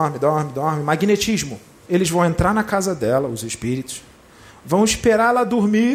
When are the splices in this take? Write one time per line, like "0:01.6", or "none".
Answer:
0:01.8

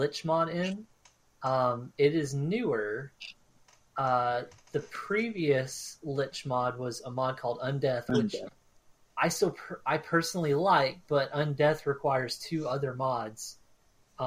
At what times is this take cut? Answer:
none

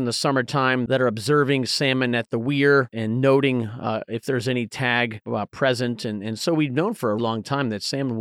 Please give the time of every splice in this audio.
0:07.2

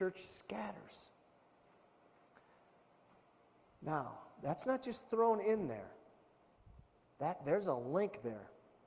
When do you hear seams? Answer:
none

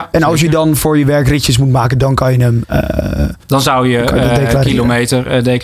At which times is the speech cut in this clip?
0:03.4

